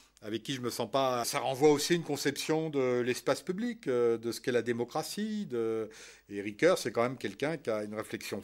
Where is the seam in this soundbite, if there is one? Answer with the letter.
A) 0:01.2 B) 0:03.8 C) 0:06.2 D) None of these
A